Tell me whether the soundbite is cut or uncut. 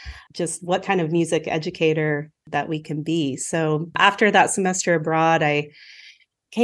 uncut